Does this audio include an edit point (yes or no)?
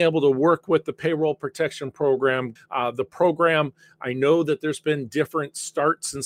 yes